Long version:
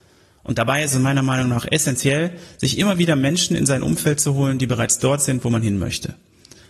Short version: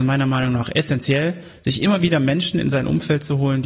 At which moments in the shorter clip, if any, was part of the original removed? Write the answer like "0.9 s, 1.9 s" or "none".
none